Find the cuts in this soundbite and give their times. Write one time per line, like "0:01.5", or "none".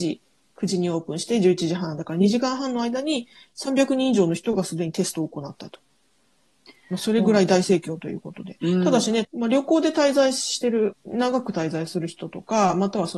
0:09.2
0:10.9